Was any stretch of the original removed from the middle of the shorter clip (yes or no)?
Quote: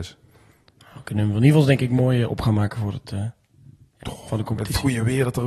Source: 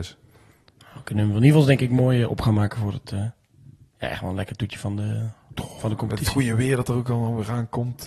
yes